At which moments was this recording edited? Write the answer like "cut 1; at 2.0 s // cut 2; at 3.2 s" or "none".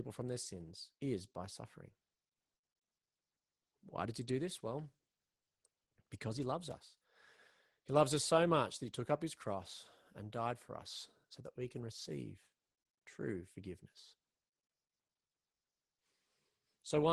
cut 1; at 0.9 s